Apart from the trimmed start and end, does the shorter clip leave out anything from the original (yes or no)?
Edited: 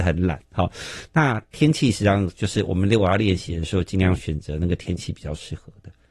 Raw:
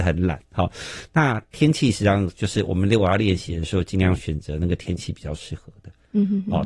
no